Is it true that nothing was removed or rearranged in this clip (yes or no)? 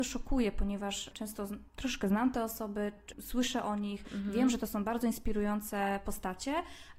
yes